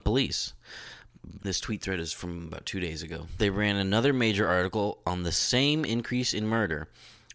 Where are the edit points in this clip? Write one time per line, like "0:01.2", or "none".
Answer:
0:01.4
0:03.4